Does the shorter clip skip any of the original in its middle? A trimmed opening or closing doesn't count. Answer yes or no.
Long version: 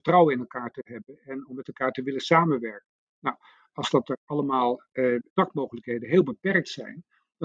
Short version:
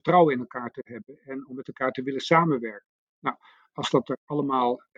no